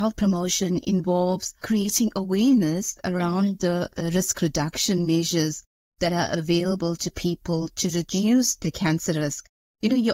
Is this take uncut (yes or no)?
yes